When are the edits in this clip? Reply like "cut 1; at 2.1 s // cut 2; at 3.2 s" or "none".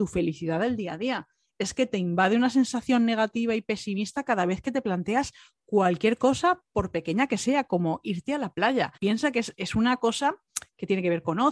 cut 1; at 9.0 s